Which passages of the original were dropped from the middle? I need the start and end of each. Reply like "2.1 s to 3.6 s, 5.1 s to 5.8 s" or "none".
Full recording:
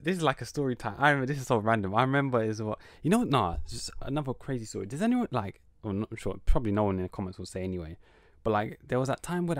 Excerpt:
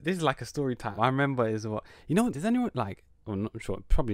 1.0 s to 1.9 s, 3.2 s to 4.9 s

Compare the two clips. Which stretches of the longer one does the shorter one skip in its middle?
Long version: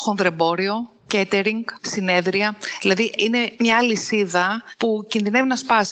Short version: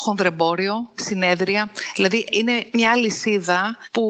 0.9 s to 1.8 s

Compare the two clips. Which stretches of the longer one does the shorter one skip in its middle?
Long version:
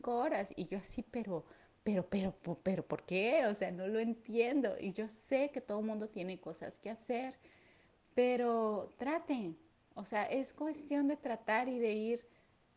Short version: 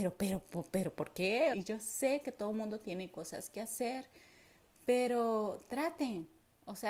3.4 s to 4.8 s

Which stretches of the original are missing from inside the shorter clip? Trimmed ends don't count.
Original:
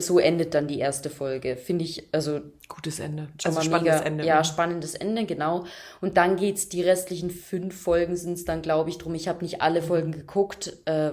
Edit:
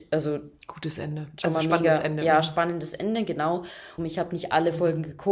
6.0 s to 9.1 s

